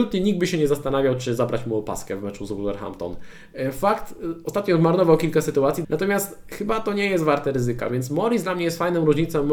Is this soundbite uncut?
no; 1 cut; at 5.8 s

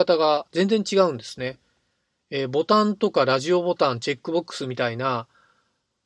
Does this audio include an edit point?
no; 0 cuts

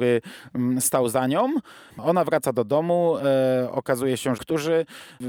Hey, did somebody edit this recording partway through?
yes; 2 cuts; at 1.9 s, 4.4 s

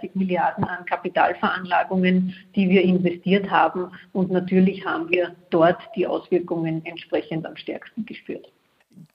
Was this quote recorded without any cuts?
yes; 0 cuts

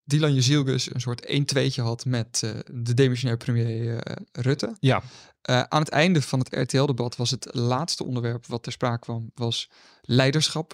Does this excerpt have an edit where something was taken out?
no; 0 cuts

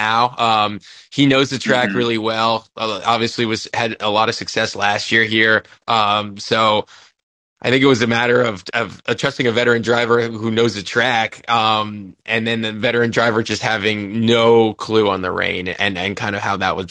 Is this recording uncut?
yes; 0 cuts

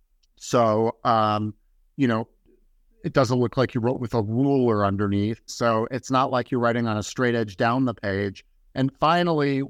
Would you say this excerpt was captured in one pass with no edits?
no; 1 cut; at 5.5 s

